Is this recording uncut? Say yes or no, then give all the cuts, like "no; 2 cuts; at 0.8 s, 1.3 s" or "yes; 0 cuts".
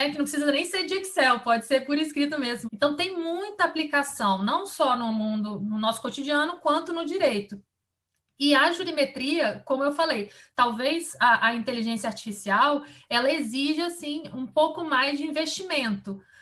no; 1 cut; at 2.6 s